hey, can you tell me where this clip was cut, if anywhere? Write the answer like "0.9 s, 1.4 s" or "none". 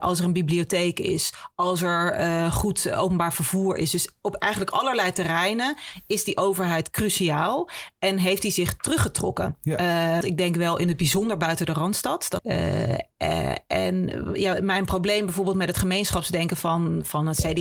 10.2 s, 12.4 s